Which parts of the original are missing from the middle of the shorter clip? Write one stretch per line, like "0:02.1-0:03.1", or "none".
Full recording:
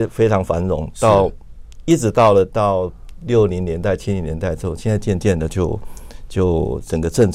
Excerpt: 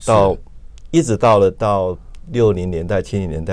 none